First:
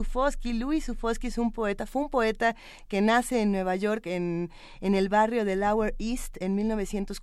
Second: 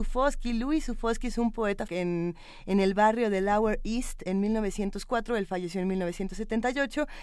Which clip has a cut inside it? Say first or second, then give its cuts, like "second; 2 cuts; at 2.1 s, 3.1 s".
second; 1 cut; at 1.9 s